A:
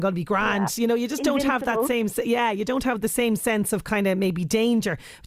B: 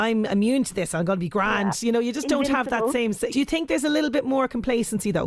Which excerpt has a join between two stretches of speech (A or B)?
B